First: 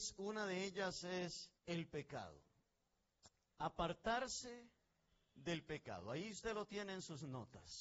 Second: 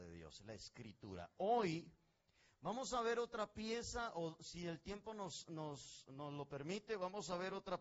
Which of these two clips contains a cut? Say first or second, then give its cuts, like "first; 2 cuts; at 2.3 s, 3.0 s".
first; 1 cut; at 1.6 s